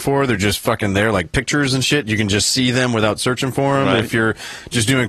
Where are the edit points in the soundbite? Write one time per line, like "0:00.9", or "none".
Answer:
none